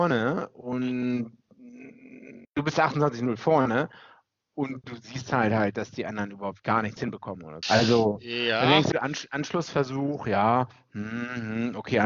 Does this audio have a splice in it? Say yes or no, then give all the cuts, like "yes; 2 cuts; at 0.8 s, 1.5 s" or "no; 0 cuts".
yes; 3 cuts; at 2.4 s, 7.6 s, 8.9 s